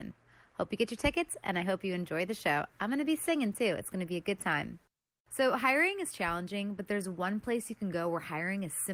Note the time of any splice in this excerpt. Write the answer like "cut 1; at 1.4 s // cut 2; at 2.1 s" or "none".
none